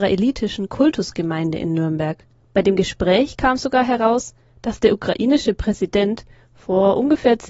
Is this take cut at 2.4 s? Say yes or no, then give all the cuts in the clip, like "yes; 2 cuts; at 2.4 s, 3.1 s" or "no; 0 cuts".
yes; 1 cut; at 2.4 s